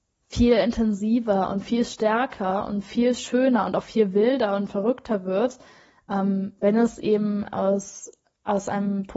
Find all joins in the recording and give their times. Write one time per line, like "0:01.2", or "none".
none